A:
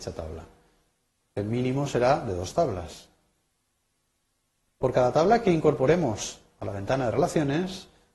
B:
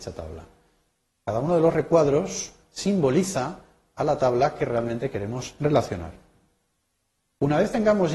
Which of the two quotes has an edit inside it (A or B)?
A